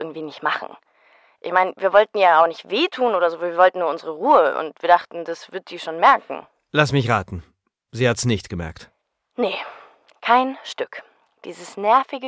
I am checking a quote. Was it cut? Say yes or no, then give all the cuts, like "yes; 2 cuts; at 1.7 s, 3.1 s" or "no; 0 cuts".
no; 0 cuts